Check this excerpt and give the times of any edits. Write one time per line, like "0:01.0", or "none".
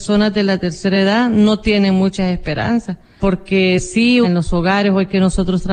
0:03.2
0:04.2